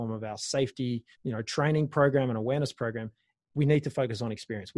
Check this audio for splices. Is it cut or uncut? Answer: cut